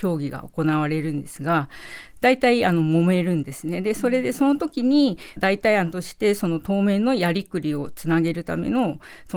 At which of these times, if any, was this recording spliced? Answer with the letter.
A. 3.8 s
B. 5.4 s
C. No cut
B